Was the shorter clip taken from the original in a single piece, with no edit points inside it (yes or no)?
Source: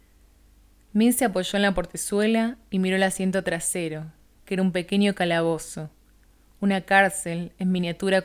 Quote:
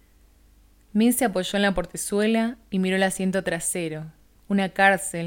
no